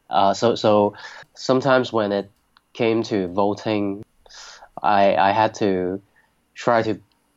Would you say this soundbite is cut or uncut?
uncut